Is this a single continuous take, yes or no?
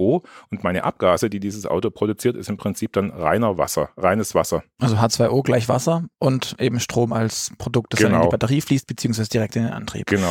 yes